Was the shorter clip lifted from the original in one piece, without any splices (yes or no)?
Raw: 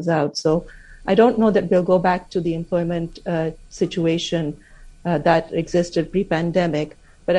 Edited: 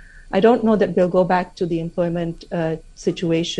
yes